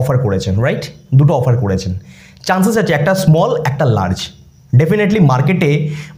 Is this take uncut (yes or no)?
yes